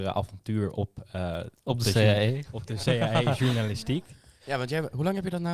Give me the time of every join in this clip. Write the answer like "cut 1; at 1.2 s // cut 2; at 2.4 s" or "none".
none